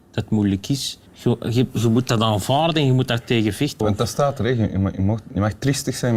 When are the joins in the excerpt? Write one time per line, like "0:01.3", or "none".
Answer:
0:01.1
0:03.8